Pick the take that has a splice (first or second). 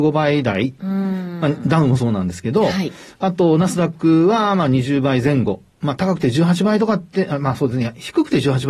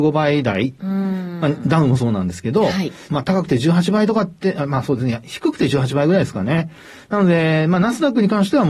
second